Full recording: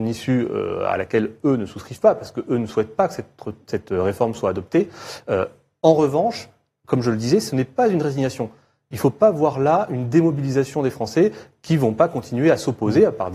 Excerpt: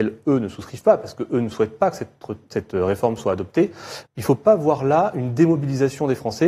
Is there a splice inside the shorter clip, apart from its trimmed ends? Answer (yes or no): yes